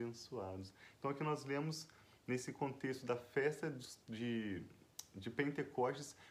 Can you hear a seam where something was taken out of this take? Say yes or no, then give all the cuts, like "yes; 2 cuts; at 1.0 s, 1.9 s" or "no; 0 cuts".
yes; 1 cut; at 4.0 s